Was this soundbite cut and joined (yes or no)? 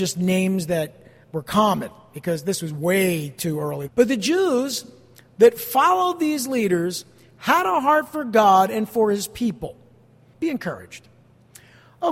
yes